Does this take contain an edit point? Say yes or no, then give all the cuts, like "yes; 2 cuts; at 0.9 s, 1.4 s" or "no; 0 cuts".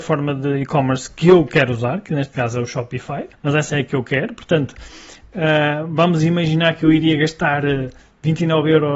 yes; 1 cut; at 3.3 s